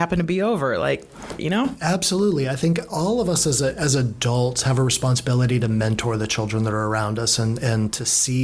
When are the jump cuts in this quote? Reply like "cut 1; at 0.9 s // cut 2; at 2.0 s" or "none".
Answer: cut 1; at 1.4 s